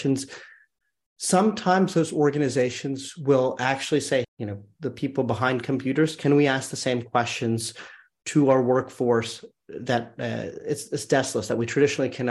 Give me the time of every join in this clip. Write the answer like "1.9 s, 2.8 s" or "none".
4.2 s